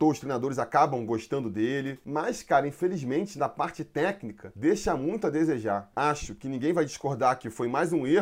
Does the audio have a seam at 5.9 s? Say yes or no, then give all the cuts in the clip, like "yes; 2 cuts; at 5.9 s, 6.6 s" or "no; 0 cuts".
yes; 1 cut; at 5.9 s